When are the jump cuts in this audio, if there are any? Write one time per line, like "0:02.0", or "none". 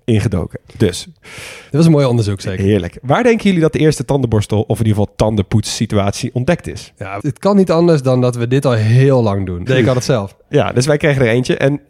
0:07.2
0:09.7